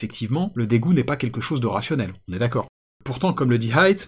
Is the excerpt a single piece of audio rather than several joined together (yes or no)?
yes